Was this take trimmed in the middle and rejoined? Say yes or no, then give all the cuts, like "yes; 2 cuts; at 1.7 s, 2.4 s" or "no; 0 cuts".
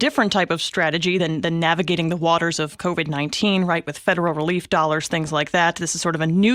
no; 0 cuts